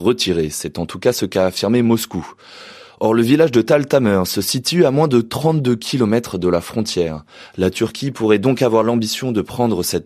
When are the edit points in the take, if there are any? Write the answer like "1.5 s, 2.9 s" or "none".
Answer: none